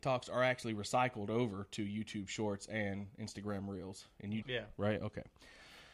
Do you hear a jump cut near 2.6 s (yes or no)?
no